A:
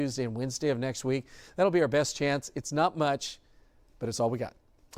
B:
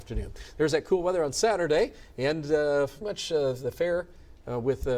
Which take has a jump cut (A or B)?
B